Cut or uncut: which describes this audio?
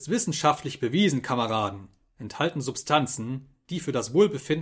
uncut